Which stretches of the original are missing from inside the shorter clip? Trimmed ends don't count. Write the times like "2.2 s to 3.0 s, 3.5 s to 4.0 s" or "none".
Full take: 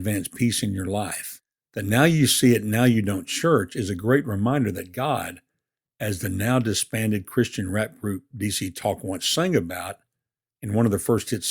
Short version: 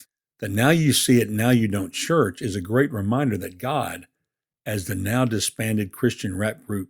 none